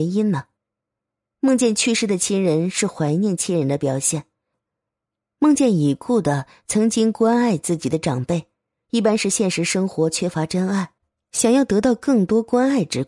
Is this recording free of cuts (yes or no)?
yes